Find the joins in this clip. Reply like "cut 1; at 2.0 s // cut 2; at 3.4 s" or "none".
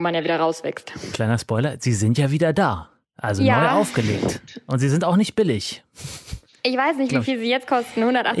none